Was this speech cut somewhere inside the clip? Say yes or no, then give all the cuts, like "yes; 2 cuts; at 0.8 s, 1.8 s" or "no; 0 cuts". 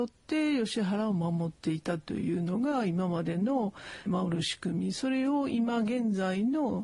yes; 1 cut; at 4.1 s